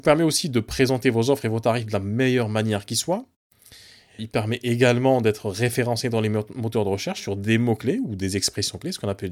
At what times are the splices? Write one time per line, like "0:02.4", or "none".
0:04.2